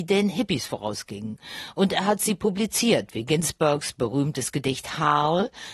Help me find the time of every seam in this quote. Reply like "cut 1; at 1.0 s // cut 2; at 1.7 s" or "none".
none

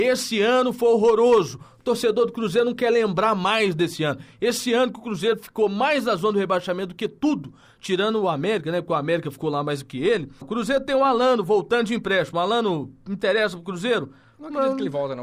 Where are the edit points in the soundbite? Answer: cut 1; at 10.4 s

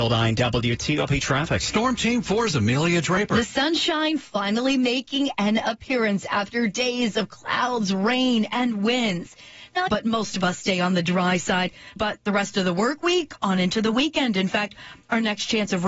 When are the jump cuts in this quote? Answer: cut 1; at 9.9 s // cut 2; at 12.0 s

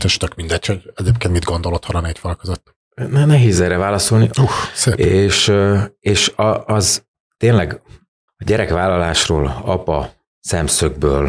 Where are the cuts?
cut 1; at 4.3 s // cut 2; at 8.3 s

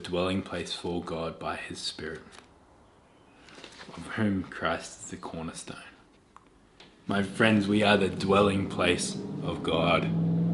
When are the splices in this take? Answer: cut 1; at 7.1 s

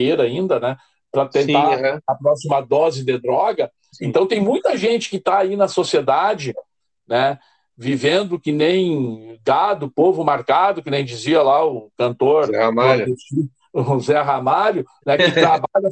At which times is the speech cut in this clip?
cut 1; at 3.9 s

